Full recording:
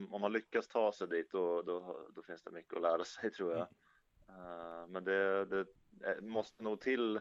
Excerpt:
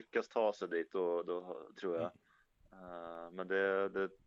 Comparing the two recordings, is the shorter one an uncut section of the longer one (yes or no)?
no